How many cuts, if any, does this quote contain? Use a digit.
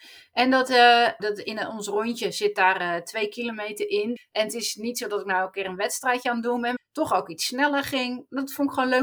3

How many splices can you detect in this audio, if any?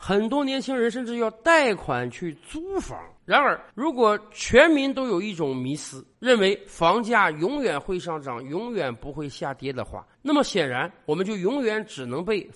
1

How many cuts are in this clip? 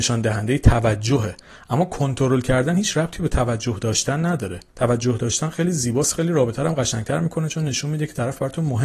1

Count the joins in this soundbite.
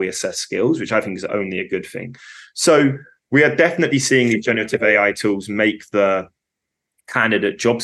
0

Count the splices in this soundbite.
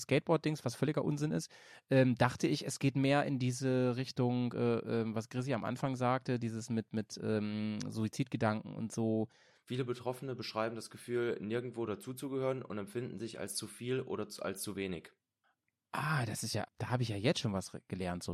2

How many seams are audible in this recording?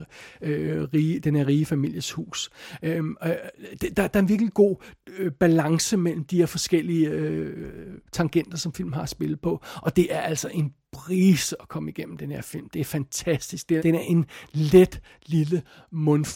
1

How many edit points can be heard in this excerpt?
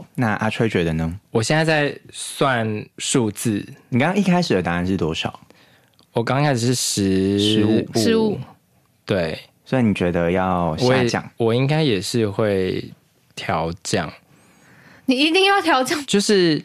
0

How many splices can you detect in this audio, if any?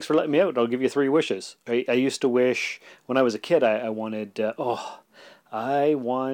1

